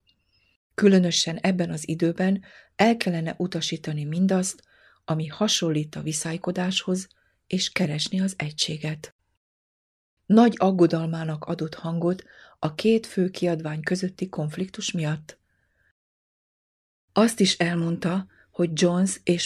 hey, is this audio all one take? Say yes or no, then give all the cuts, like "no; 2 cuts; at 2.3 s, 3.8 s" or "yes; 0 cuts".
no; 1 cut; at 10.2 s